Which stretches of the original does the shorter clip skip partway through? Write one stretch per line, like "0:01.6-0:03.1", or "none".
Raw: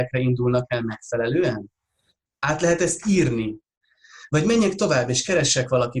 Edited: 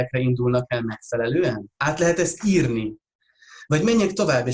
0:01.8-0:02.4

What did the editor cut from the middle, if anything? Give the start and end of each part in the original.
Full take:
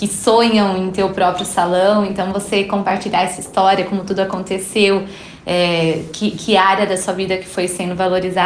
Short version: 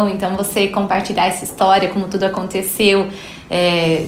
none

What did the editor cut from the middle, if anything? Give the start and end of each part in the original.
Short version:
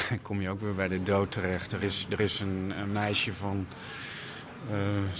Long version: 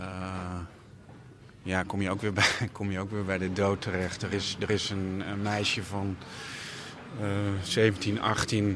none

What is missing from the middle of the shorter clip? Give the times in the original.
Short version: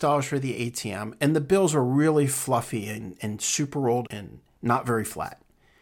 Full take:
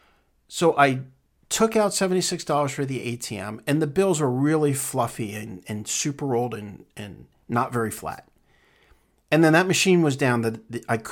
0:06.5-0:06.9

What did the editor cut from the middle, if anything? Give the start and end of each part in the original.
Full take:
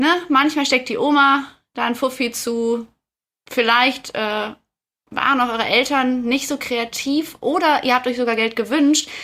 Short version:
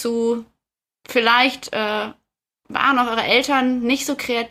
none

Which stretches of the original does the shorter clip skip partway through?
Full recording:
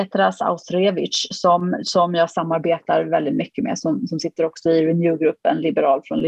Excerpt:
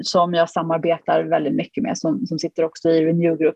none

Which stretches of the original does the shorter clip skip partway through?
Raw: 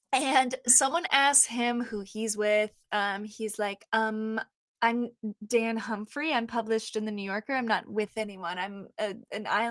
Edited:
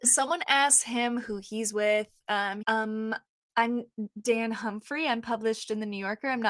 0:03.3-0:03.9

